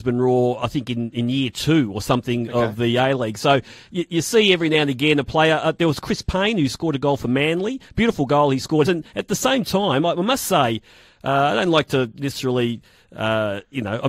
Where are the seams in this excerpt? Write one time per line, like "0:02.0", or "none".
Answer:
0:08.8